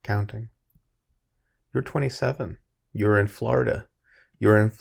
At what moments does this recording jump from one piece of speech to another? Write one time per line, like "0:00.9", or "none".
none